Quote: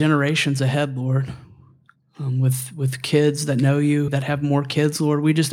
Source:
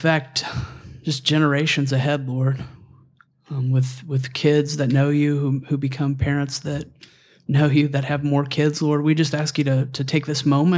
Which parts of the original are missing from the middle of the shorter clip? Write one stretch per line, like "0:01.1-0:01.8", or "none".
0:05.4-0:07.9